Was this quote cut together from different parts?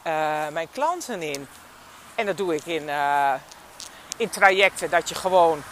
no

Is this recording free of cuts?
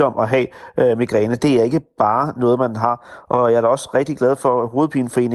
yes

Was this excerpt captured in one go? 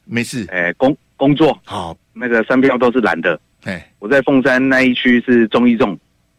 no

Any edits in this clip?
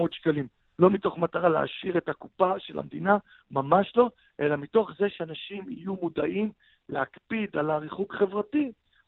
no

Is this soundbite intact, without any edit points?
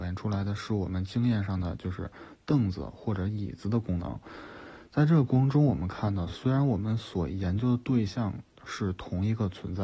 yes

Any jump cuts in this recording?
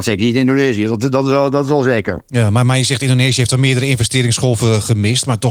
no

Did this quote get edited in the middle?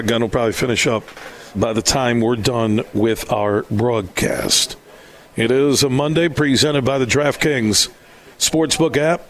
yes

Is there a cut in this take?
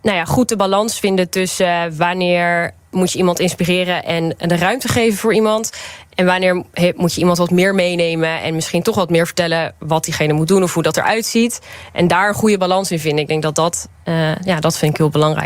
no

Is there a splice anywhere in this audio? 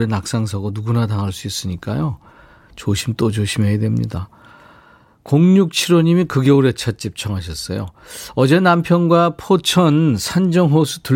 no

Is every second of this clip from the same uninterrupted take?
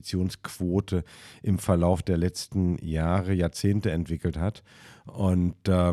yes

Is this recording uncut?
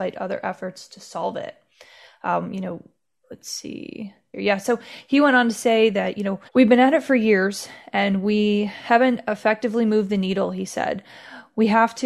no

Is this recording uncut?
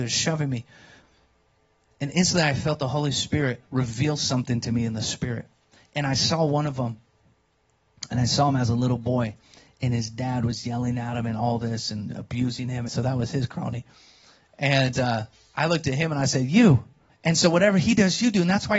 no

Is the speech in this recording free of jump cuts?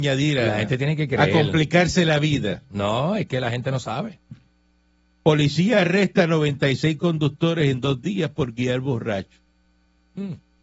yes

